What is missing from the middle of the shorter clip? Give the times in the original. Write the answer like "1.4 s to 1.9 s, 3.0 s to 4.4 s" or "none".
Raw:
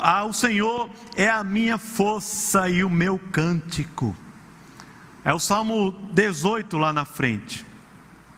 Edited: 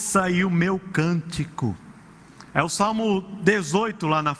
4.9 s to 5.2 s